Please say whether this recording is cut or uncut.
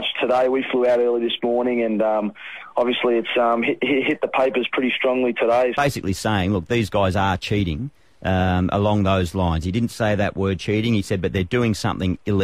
cut